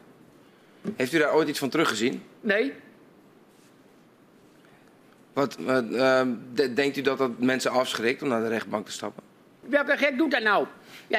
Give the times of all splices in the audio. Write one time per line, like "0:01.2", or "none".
0:09.6